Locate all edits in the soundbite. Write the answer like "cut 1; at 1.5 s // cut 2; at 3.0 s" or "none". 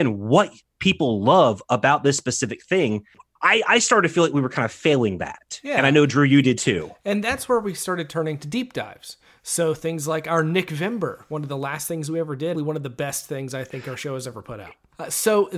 cut 1; at 12.5 s